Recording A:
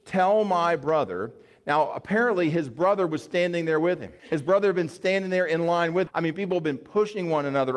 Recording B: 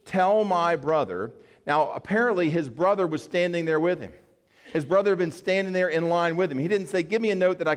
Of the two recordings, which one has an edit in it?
A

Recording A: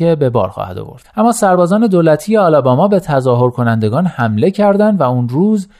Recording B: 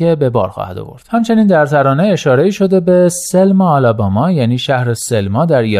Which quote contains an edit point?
A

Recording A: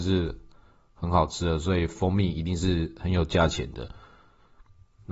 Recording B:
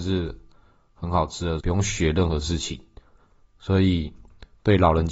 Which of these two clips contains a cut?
B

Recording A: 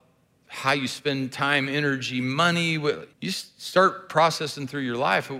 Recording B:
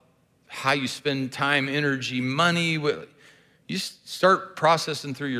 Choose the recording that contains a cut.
A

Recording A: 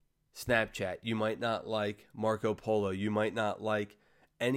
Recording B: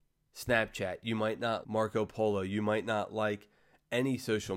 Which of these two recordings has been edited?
B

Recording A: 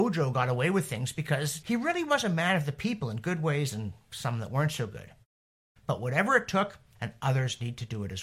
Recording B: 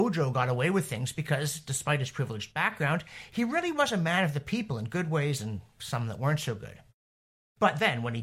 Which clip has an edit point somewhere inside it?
A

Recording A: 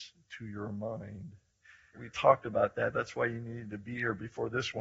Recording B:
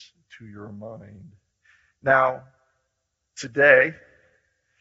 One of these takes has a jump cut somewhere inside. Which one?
A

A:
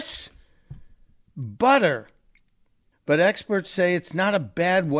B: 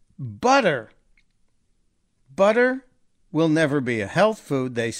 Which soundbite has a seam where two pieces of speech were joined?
A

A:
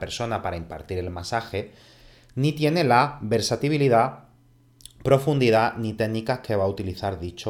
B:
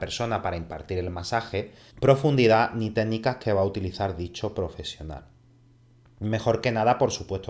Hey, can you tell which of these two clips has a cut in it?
B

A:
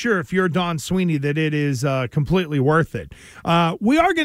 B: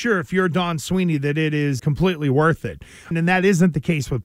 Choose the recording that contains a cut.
B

